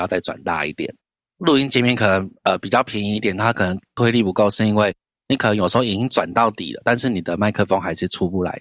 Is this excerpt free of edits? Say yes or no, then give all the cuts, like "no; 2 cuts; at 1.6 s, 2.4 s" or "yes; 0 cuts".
yes; 0 cuts